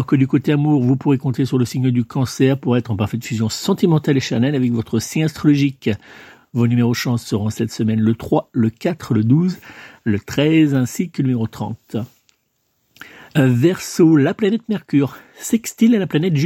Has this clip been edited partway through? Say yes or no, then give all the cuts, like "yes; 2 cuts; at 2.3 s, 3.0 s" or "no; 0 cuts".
no; 0 cuts